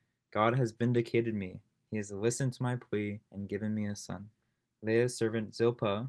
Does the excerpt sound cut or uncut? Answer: cut